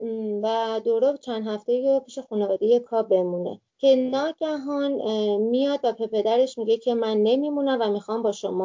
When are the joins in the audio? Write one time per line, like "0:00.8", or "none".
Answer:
0:03.7